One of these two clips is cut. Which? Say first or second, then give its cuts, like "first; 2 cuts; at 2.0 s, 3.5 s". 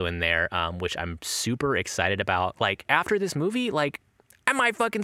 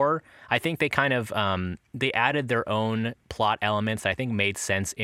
first; 1 cut; at 2.9 s